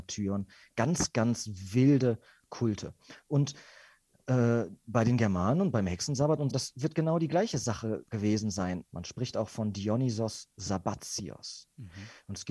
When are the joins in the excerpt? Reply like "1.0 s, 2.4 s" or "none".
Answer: 6.5 s, 8.9 s